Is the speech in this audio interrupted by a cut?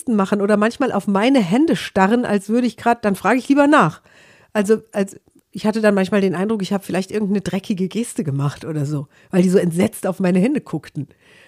no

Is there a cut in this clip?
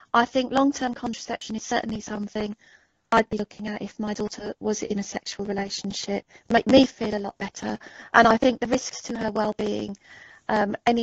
no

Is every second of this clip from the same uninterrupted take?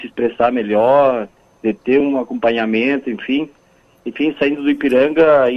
yes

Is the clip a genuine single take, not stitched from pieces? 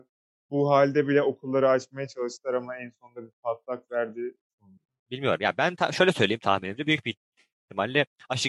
yes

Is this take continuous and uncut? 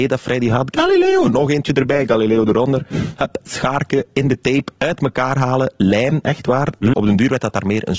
no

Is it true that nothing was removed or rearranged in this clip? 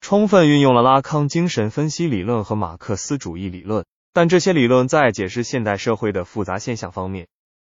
yes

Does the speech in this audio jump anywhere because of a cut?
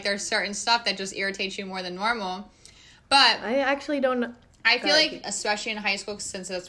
yes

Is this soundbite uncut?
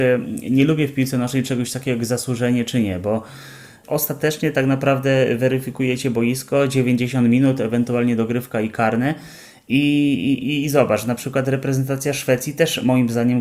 yes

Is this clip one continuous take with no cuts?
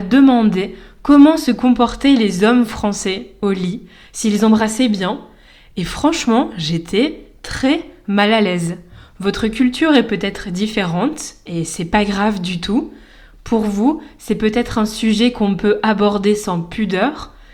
yes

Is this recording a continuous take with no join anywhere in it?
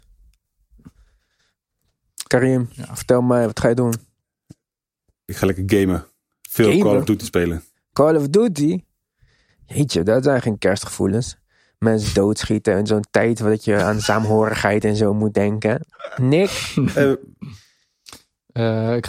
yes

